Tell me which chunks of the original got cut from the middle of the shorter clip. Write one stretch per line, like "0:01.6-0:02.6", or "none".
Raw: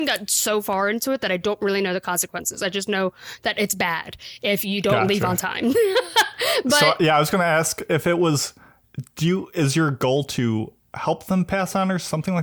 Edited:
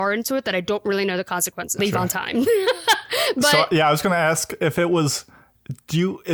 0:02.6-0:05.1